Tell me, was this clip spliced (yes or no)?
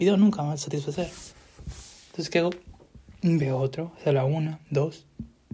no